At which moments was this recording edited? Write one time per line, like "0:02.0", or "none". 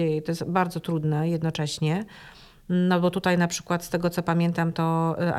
none